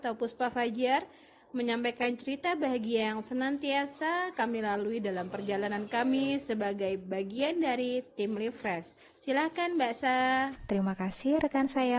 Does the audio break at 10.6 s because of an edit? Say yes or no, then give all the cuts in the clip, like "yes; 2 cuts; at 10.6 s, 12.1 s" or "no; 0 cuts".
yes; 1 cut; at 10.6 s